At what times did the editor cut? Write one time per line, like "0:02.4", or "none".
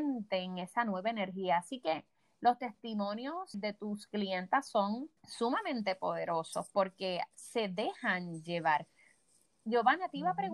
0:03.5
0:05.2